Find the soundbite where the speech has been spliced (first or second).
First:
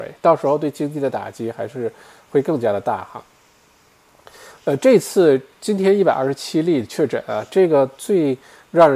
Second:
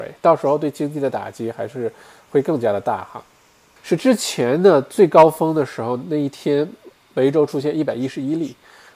second